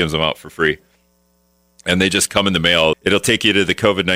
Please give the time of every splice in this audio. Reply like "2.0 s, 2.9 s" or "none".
2.9 s